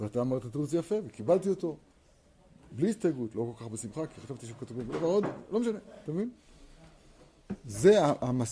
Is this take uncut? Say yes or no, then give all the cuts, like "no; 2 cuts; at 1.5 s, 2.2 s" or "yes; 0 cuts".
yes; 0 cuts